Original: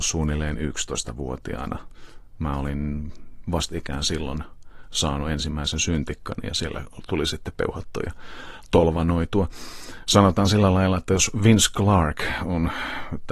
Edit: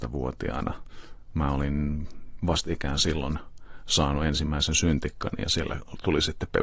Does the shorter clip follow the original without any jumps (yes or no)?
yes